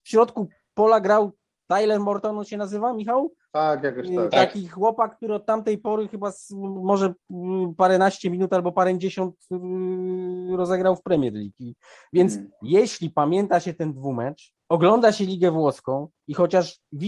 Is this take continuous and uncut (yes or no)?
no